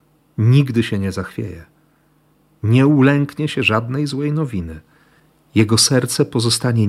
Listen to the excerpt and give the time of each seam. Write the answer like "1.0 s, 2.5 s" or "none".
none